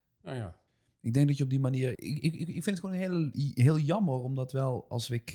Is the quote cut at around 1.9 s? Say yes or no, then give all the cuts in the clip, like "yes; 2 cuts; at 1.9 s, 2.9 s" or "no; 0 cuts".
yes; 1 cut; at 1.9 s